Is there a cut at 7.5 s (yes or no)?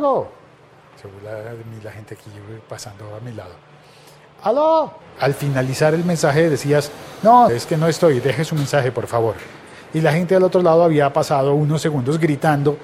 yes